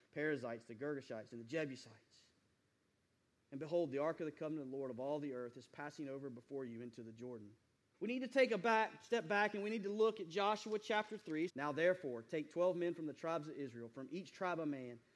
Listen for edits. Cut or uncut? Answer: cut